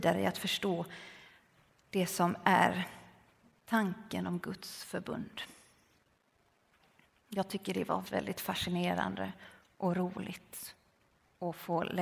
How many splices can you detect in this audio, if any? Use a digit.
1